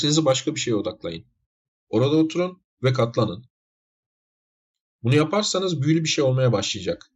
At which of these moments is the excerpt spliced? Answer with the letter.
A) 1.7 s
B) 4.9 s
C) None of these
A